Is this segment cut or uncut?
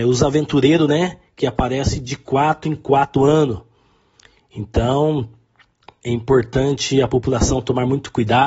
uncut